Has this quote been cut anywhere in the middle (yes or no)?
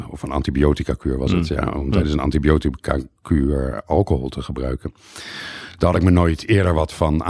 no